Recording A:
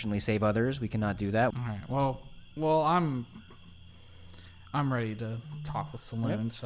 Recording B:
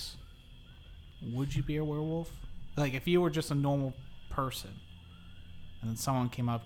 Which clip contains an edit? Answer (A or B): A